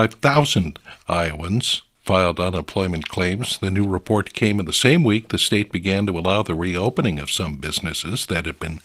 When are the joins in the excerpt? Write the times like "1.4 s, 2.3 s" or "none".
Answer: none